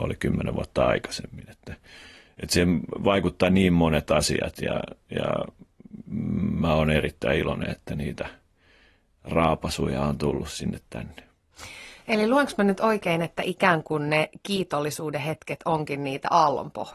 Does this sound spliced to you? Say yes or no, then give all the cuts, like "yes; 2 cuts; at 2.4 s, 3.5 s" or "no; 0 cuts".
no; 0 cuts